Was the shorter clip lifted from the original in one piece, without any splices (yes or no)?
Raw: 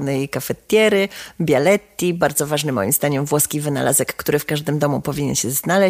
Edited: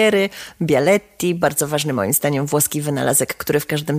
yes